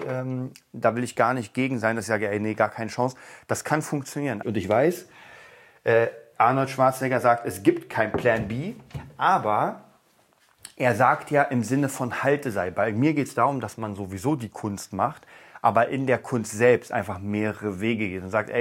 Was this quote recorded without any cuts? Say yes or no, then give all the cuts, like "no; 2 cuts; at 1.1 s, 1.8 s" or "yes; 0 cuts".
no; 1 cut; at 4.4 s